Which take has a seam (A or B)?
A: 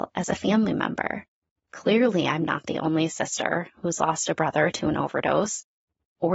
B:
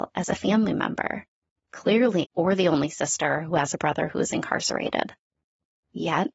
B